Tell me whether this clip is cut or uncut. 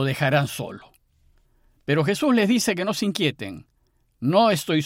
uncut